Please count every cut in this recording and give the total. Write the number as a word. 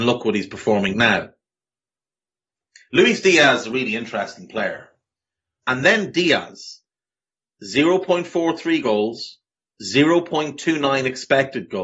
two